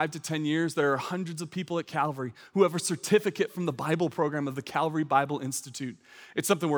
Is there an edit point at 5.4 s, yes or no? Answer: no